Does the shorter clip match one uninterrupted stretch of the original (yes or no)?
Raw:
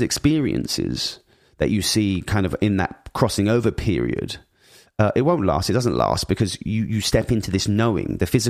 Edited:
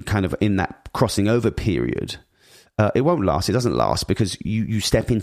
yes